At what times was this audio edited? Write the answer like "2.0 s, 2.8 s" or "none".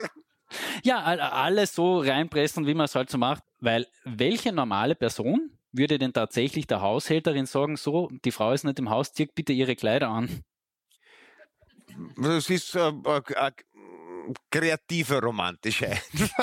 3.4 s